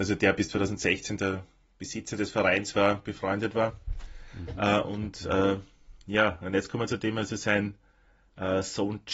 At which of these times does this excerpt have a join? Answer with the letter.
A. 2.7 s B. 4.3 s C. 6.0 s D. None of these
D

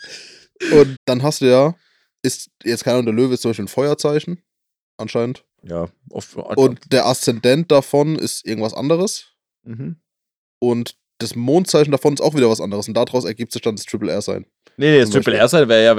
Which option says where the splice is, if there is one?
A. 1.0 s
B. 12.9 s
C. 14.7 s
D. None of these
A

